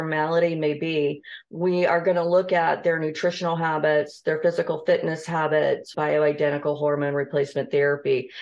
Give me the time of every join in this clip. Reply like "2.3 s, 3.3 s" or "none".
5.9 s